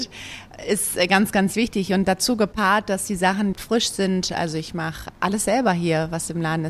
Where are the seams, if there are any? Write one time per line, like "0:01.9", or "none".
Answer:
0:03.5